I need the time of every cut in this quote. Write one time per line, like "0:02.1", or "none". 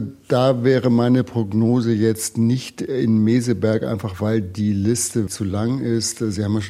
0:05.3